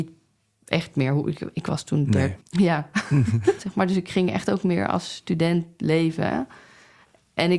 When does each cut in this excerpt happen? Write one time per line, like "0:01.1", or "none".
0:02.4
0:03.6